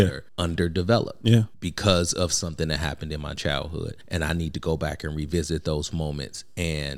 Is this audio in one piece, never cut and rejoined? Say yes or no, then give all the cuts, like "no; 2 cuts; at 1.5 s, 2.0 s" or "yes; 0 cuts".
yes; 0 cuts